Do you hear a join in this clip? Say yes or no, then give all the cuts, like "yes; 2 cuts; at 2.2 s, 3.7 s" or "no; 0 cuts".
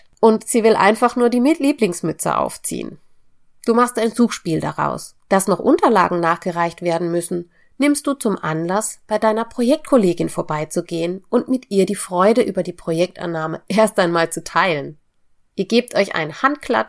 yes; 1 cut; at 5.3 s